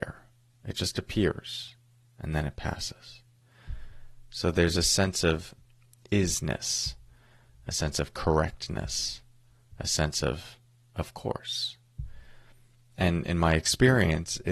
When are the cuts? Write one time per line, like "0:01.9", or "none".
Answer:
none